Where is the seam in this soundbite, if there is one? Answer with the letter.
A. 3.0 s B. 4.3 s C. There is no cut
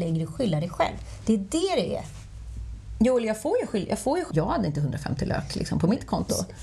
B